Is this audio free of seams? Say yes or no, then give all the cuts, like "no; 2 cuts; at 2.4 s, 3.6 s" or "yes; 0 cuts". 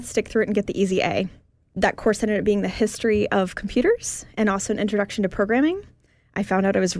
yes; 0 cuts